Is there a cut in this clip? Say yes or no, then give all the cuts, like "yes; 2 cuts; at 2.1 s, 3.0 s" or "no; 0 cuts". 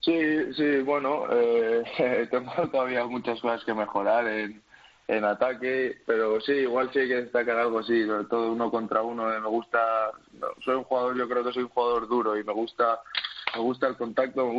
no; 0 cuts